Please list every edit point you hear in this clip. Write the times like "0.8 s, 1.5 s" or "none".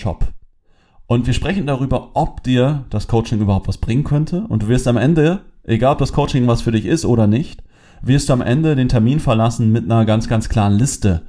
none